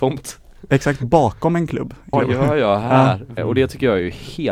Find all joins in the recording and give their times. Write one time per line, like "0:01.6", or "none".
0:02.1
0:03.4